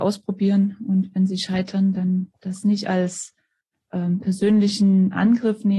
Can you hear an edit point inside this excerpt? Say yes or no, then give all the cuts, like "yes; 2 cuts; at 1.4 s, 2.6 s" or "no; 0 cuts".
no; 0 cuts